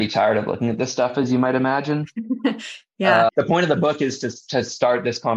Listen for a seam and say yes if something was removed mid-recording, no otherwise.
yes